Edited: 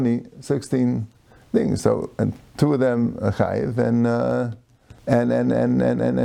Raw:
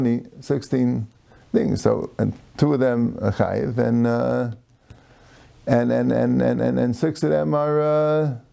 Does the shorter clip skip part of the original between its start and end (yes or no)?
yes